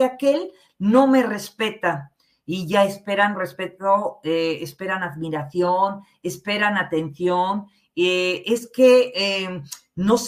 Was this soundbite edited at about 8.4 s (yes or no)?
no